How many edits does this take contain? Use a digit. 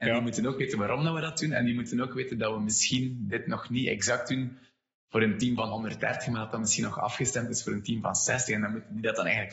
0